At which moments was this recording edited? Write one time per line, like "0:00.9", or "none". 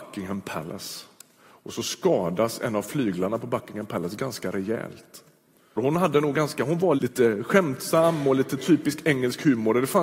0:05.8
0:07.0